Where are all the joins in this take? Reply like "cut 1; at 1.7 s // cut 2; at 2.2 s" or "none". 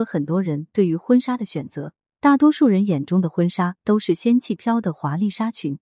cut 1; at 4.6 s